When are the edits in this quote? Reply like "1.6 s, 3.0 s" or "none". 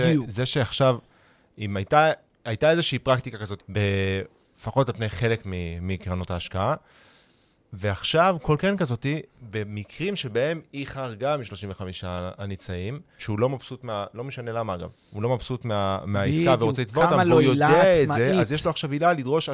3.6 s, 13.2 s